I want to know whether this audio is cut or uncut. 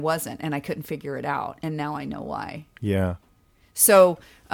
uncut